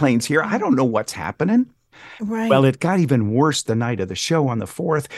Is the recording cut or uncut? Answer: uncut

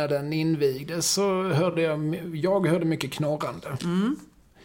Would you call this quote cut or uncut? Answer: uncut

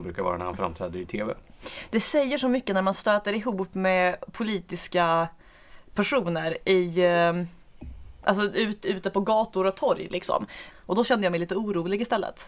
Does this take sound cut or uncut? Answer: cut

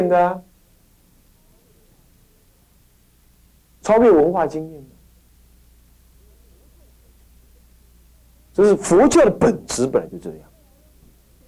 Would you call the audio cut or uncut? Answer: uncut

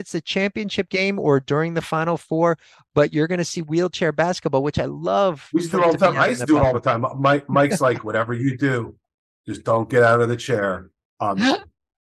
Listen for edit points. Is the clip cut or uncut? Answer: uncut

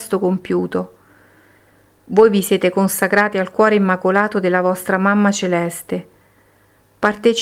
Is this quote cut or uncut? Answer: uncut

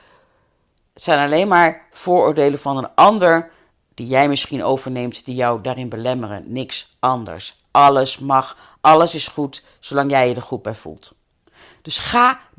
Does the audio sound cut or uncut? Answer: uncut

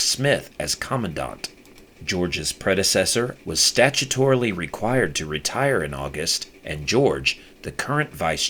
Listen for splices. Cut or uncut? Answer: cut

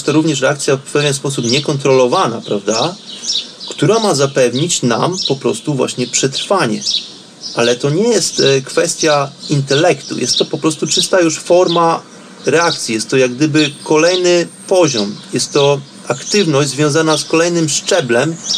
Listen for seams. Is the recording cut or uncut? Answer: uncut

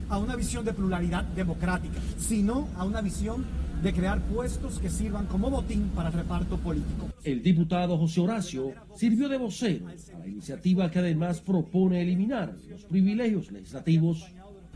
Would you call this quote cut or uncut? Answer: cut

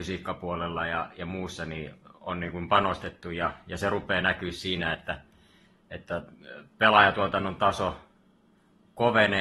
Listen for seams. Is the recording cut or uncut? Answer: uncut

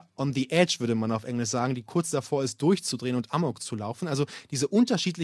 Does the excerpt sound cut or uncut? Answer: uncut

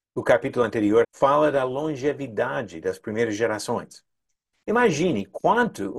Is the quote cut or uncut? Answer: cut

